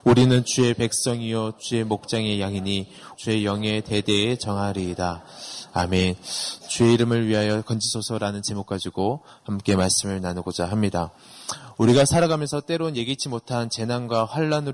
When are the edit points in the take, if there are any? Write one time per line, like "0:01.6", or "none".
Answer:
0:03.1